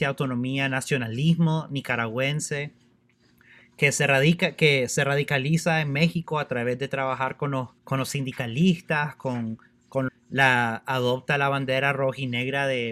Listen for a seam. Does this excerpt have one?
yes; 2 cuts; at 7.8 s, 10.1 s

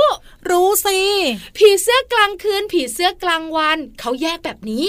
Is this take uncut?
yes; 0 cuts

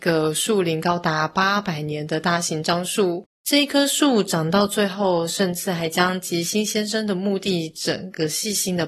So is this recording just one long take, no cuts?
no; 1 cut; at 3.4 s

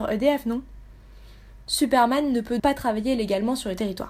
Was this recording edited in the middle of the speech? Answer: yes; 1 cut; at 2.6 s

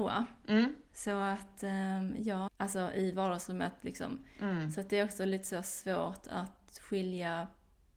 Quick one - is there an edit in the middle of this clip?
yes; 1 cut; at 2.5 s

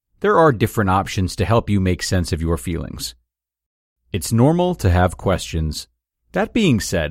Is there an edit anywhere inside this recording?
yes; 1 cut; at 6.1 s

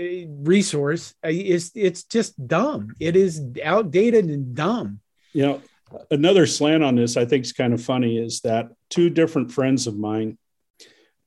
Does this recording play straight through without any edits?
yes; 0 cuts

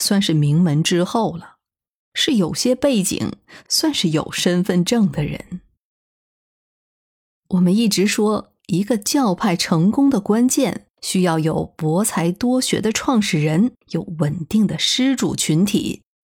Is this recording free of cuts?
no; 2 cuts; at 10.9 s, 13.8 s

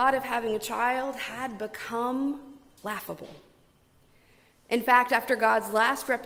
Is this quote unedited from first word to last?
yes; 0 cuts

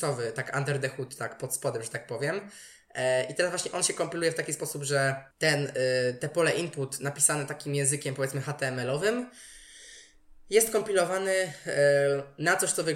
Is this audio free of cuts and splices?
no; 1 cut; at 5.3 s

